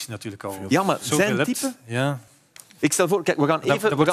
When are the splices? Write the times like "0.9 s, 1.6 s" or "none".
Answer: none